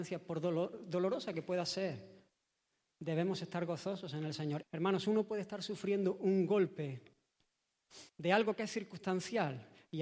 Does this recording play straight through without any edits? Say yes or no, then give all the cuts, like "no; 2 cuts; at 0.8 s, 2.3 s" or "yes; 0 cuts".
no; 2 cuts; at 4.6 s, 8.1 s